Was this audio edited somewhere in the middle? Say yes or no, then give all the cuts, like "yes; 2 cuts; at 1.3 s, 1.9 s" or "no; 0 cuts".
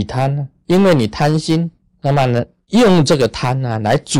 yes; 1 cut; at 1.8 s